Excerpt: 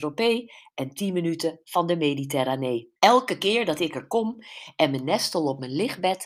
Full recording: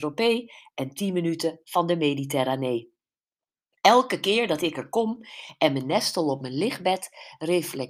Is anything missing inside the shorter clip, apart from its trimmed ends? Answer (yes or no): yes